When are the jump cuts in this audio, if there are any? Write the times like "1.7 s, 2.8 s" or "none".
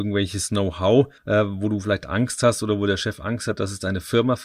1.2 s